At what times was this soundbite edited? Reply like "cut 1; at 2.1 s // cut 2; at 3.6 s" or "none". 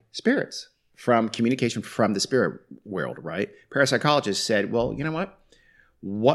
none